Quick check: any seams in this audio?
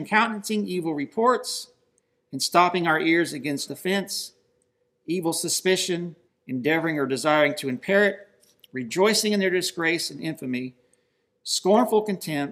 yes; 2 cuts; at 3.7 s, 6.3 s

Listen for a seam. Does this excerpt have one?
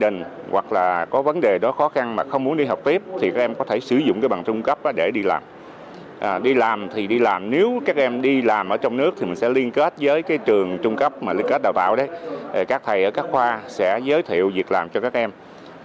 no; 0 cuts

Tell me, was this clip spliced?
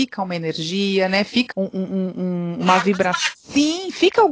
yes; 2 cuts; at 1.5 s, 3.3 s

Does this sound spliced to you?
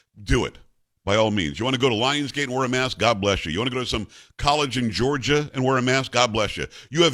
no; 0 cuts

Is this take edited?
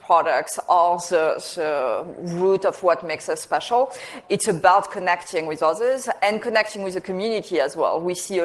no; 0 cuts

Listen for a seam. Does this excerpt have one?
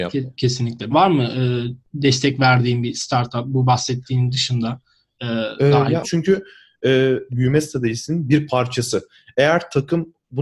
yes; 3 cuts; at 0.9 s, 6.0 s, 7.3 s

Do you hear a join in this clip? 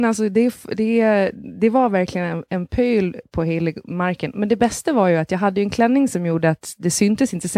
no; 0 cuts

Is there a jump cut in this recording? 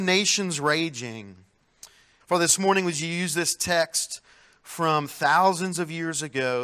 yes; 1 cut; at 2.2 s

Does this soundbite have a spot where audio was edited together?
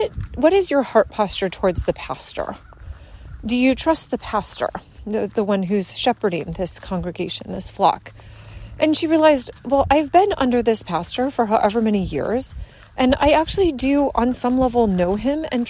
no; 0 cuts

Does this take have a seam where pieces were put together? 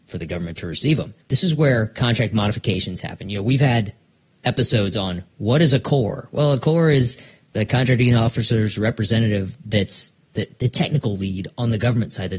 yes; 1 cut; at 1.2 s

